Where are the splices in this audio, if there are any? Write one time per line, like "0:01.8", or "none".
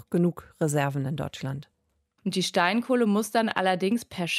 0:02.2